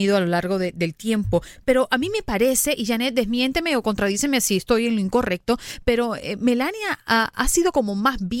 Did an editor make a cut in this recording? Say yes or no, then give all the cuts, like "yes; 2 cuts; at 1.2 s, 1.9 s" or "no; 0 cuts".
no; 0 cuts